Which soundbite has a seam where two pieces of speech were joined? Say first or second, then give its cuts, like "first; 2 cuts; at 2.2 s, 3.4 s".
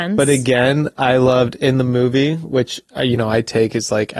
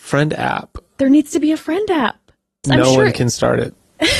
second; 1 cut; at 2.6 s